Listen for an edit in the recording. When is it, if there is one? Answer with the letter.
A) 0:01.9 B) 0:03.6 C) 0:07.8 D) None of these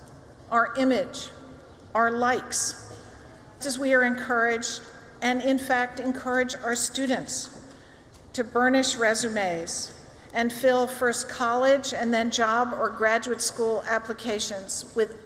B